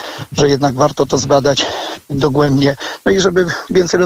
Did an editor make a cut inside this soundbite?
no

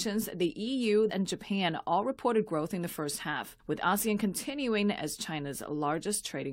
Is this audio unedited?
no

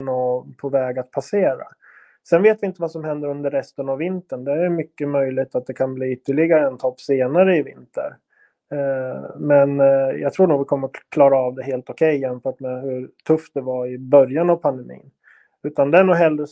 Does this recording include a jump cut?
no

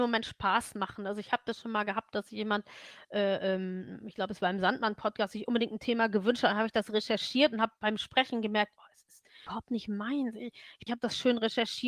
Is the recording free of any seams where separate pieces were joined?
no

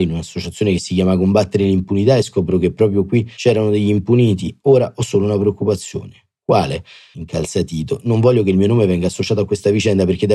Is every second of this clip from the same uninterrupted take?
yes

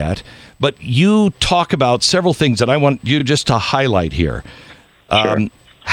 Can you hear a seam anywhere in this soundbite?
no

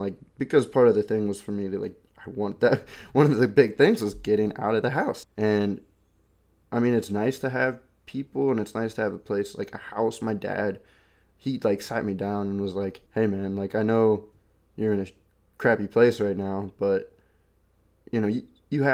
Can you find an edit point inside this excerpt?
yes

